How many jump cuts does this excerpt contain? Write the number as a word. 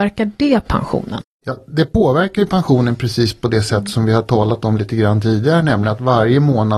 zero